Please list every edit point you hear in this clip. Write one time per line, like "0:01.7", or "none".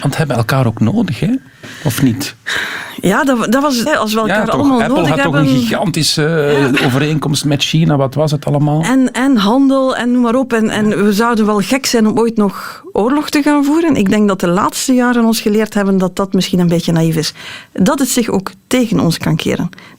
0:03.9

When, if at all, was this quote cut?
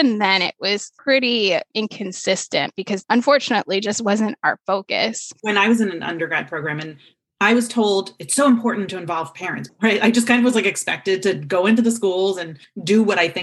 0:09.7

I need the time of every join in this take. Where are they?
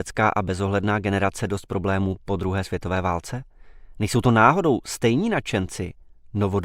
none

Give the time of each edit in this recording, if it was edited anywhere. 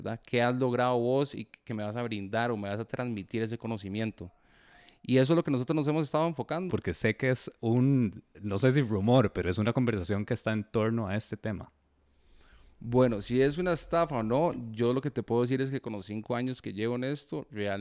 0:06.7
0:08.3

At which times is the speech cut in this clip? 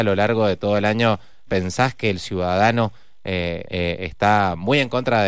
0:01.5
0:03.6

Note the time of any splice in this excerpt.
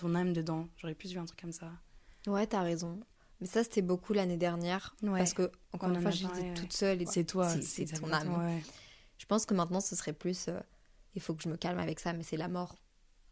0:07.0

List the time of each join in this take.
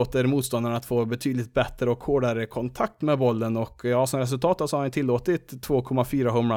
none

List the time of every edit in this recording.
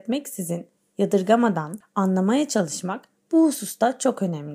0:01.8

